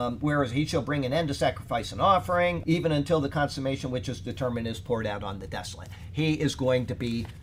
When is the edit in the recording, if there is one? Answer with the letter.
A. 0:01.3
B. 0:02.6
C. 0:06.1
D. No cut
B